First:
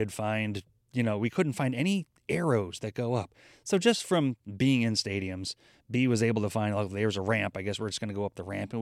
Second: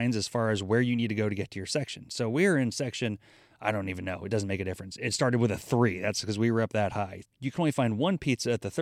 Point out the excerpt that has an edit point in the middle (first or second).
second